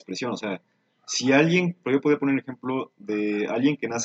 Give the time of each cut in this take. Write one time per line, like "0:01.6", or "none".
0:01.8